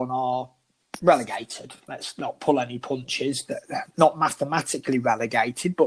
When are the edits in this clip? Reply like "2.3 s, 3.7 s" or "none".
none